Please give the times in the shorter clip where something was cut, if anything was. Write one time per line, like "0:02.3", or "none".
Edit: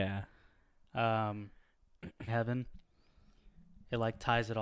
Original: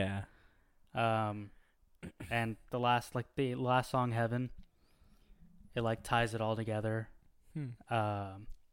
0:02.3